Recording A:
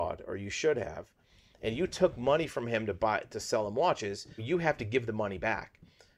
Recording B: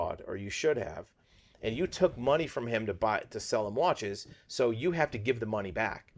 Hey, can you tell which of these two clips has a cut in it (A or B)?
A